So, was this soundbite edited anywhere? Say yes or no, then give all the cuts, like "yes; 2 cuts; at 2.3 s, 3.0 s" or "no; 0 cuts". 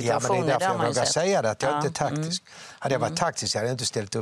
no; 0 cuts